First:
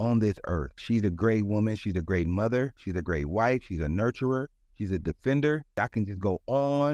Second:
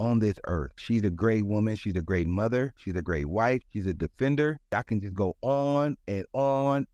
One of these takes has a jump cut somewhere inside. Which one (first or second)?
second